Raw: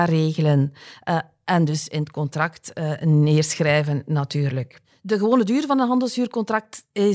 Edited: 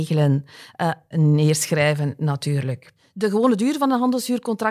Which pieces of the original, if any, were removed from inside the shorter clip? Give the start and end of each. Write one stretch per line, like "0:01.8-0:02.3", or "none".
0:01.4-0:03.0